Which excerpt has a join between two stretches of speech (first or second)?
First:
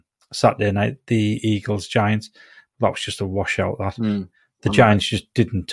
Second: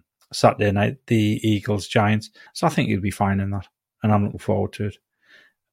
second